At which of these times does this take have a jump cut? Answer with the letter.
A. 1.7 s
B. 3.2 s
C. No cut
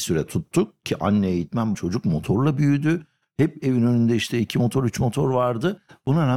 A